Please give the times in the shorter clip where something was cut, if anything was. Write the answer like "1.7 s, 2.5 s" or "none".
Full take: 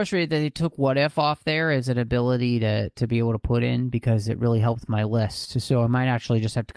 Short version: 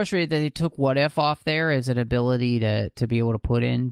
none